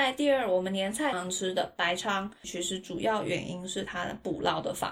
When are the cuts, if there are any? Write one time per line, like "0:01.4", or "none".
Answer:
0:01.1
0:02.4